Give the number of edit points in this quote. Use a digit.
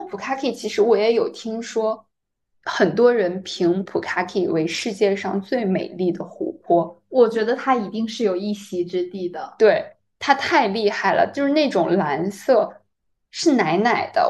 0